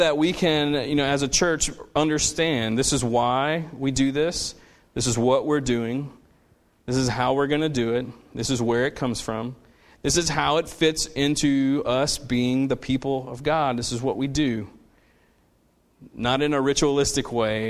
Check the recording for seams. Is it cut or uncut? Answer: uncut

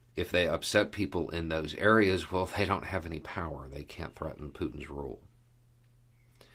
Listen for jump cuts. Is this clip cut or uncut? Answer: uncut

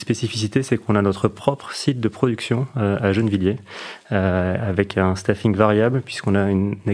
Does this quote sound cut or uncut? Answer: uncut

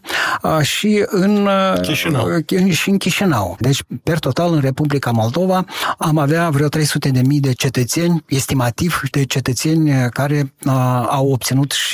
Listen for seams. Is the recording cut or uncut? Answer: uncut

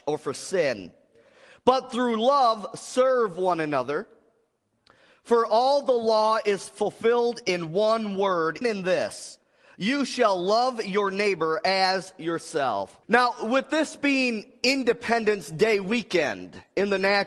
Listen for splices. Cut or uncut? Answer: cut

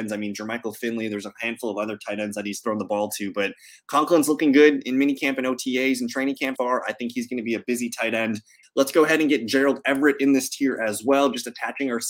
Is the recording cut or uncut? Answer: cut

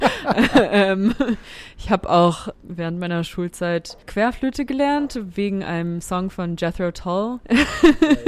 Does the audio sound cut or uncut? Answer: uncut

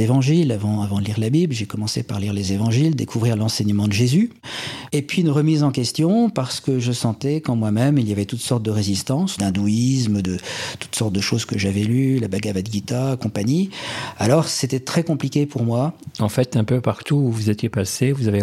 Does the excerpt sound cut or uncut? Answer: cut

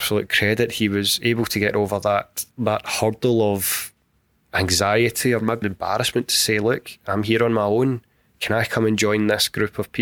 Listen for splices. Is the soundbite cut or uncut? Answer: cut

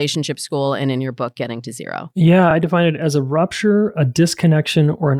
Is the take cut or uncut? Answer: uncut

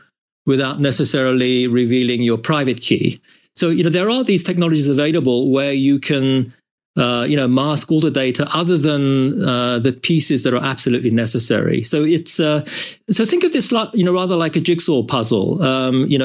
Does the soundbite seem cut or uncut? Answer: uncut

